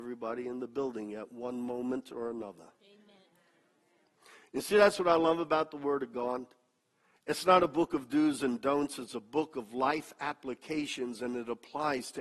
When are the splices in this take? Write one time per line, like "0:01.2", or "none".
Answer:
none